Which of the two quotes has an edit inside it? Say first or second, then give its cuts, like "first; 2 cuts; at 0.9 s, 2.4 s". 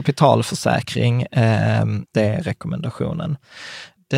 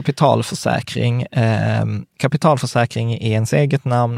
first; 1 cut; at 2.1 s